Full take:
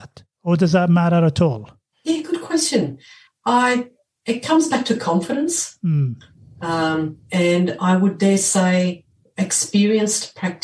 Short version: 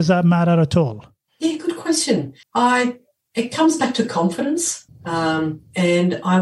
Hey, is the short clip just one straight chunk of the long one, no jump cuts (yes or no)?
no